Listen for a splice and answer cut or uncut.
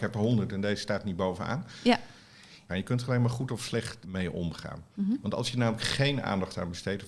cut